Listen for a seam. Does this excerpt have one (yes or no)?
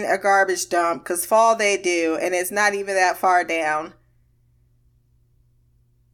no